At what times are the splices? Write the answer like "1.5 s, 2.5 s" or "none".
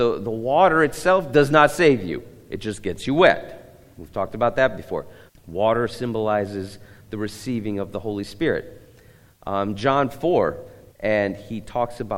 5.3 s, 10.9 s